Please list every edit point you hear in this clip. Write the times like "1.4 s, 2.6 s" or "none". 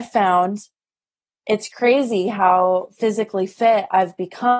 none